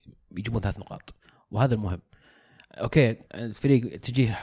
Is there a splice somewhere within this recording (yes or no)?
yes